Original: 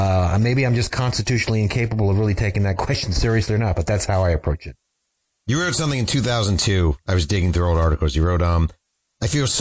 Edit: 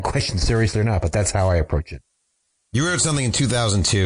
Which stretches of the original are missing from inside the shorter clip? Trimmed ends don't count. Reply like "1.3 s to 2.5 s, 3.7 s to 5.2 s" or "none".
none